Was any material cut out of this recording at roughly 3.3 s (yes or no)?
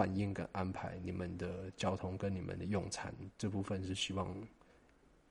yes